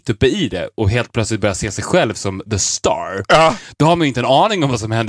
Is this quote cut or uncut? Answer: uncut